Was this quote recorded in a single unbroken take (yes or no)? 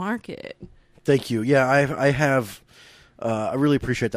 yes